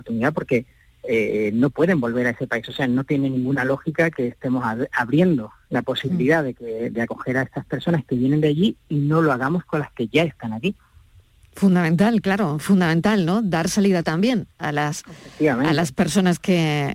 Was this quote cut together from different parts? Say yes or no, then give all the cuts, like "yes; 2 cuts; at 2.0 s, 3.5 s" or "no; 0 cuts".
no; 0 cuts